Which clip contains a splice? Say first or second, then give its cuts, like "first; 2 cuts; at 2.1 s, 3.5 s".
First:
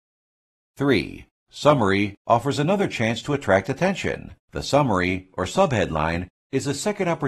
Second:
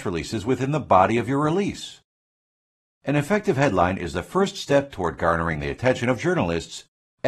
first; 2 cuts; at 2.2 s, 4.4 s